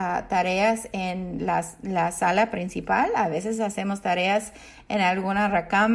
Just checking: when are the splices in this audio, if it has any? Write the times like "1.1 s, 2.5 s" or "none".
none